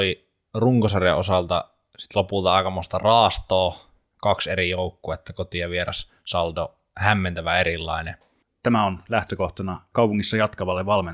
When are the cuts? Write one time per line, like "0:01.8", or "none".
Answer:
0:08.5